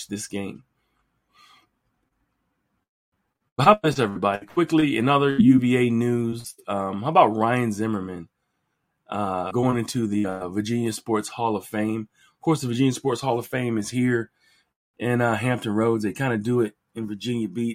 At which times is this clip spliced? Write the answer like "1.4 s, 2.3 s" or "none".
none